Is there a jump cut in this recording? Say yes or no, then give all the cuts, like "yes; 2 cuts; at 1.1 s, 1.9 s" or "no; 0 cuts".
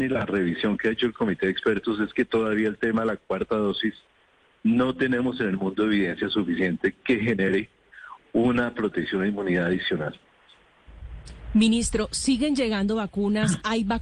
no; 0 cuts